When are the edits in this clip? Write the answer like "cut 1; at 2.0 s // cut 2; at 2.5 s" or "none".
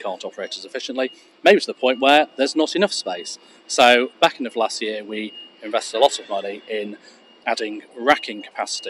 none